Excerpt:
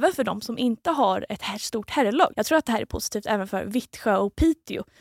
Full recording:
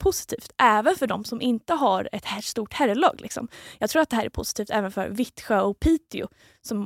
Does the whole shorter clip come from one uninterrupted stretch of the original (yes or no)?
no